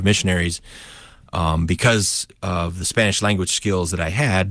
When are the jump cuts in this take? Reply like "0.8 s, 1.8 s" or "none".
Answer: 2.4 s